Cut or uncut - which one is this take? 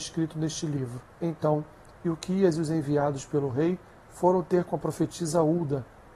cut